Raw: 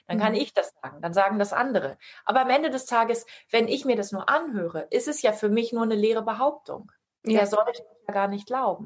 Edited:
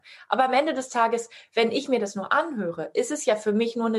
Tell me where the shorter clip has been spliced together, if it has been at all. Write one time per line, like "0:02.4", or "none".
none